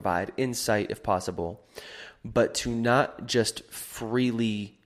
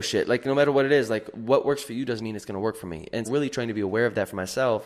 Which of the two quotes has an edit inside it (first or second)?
second